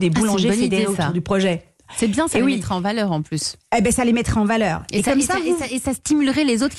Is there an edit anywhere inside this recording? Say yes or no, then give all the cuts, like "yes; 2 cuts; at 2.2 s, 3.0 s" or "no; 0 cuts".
no; 0 cuts